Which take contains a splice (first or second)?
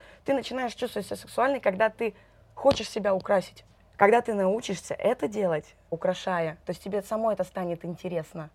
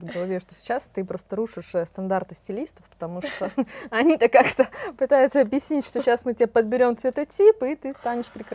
first